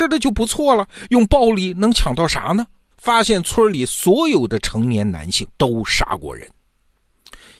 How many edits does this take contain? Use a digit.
2